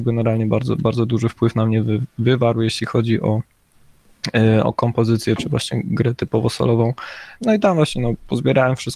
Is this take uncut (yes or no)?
no